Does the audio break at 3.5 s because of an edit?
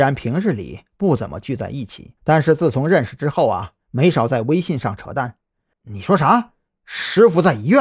no; 2 cuts; at 2.2 s, 5.7 s

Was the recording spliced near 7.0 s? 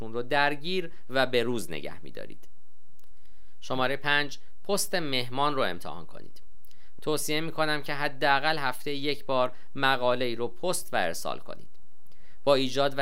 yes; 1 cut; at 7.0 s

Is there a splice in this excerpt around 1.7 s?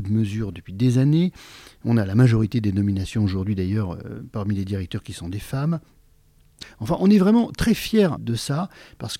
no; 2 cuts; at 6.6 s, 8.2 s

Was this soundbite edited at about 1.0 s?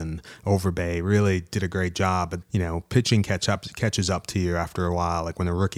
no; 1 cut; at 2.4 s

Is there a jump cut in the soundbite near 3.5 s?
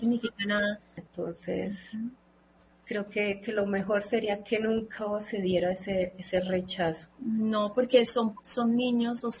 no; 1 cut; at 1.0 s

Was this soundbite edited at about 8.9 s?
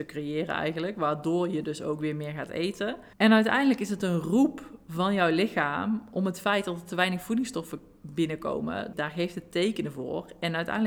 yes; 2 cuts; at 3.1 s, 8.9 s

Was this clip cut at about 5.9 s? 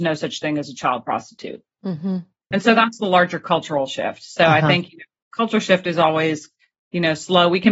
no; 1 cut; at 2.5 s

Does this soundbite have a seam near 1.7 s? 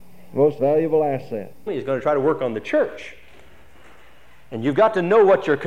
yes; 1 cut; at 1.7 s

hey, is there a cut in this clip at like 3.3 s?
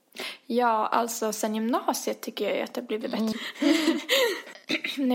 yes; 1 cut; at 3.3 s

